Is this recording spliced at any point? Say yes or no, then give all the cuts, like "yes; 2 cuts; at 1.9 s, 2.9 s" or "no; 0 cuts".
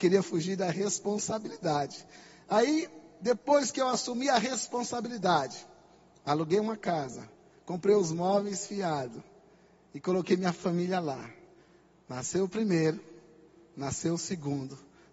no; 0 cuts